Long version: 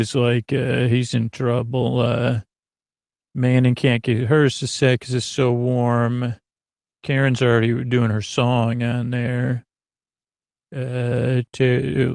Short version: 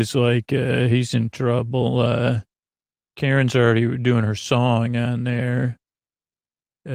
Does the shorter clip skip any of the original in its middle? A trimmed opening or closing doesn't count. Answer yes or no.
yes